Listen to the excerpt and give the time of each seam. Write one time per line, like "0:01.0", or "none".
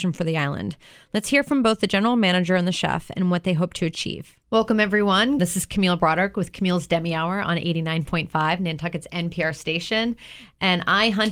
0:05.4